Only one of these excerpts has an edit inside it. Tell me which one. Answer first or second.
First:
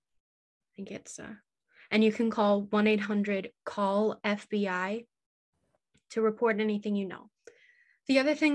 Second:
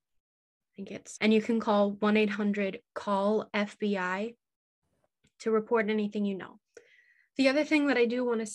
second